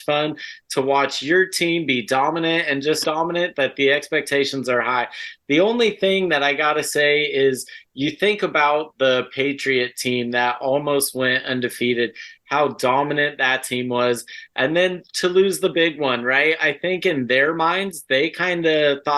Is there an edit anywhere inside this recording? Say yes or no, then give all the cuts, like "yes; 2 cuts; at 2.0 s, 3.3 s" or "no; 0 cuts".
yes; 1 cut; at 3.0 s